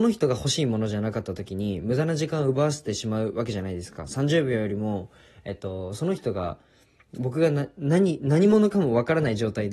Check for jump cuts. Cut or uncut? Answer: uncut